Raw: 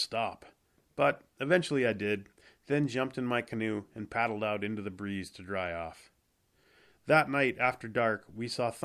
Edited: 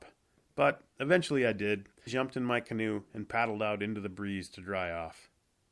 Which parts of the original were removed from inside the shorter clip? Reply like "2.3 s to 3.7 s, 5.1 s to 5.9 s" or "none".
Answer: 2.5 s to 2.9 s